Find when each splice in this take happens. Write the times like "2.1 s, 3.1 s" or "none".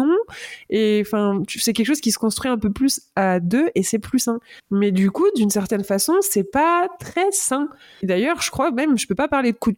4.6 s, 8.0 s